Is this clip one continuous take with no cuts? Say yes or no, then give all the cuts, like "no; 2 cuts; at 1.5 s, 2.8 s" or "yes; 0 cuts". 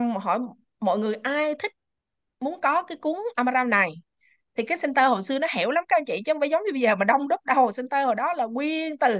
yes; 0 cuts